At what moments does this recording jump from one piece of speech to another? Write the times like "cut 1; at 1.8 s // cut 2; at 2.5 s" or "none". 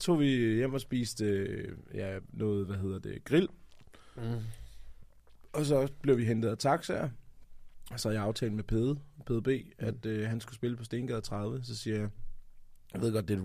none

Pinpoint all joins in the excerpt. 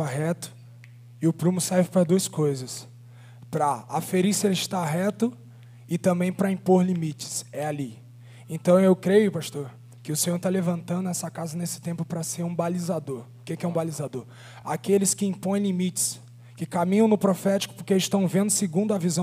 none

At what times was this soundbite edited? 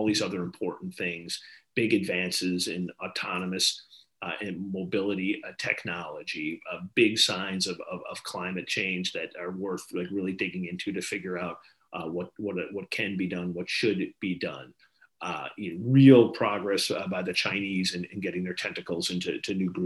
none

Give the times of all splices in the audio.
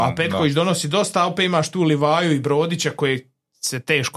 none

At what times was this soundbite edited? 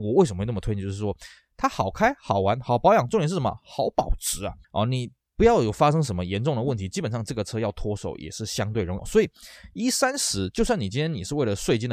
cut 1; at 4.6 s // cut 2; at 9.0 s

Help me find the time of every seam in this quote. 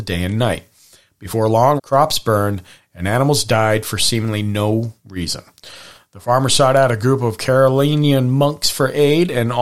cut 1; at 1.8 s

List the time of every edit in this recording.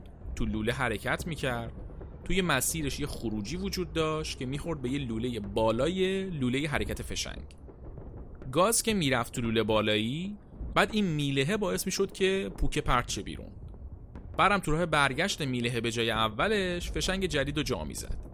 cut 1; at 10.7 s

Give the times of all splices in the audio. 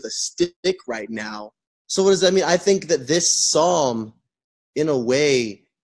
cut 1; at 1.6 s

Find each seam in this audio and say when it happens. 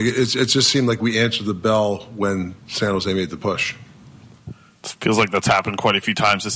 cut 1; at 2.6 s

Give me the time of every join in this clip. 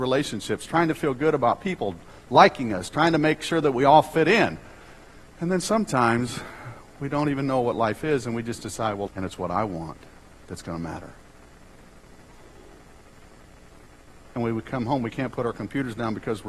cut 1; at 9.1 s // cut 2; at 14.3 s

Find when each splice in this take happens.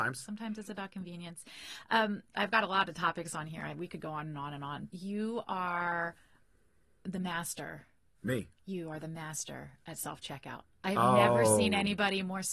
cut 1; at 2.3 s // cut 2; at 4.9 s

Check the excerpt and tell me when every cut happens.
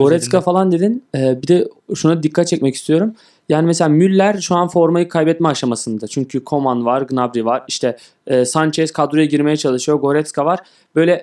none

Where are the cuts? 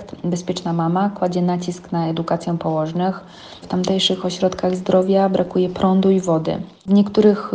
cut 1; at 3.6 s

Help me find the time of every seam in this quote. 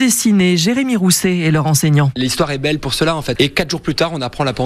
cut 1; at 3.4 s

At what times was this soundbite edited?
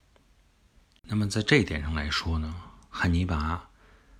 cut 1; at 1.0 s

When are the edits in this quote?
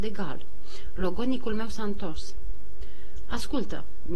none

